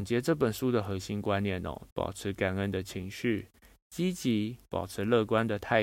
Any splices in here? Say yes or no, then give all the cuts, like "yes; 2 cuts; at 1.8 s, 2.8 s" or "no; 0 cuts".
yes; 1 cut; at 1.9 s